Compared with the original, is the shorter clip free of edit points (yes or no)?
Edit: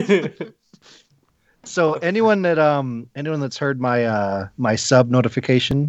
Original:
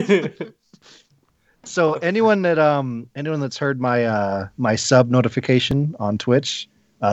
yes